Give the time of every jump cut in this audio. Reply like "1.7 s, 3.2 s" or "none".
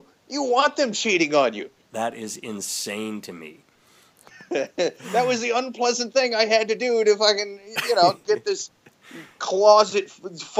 1.8 s, 4.3 s